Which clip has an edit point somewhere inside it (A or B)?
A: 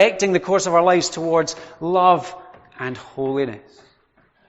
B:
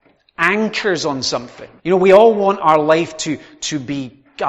B